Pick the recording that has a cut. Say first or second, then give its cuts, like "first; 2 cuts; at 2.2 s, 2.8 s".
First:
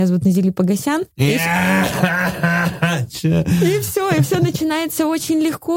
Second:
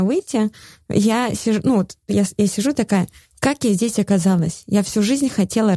first; 1 cut; at 1.1 s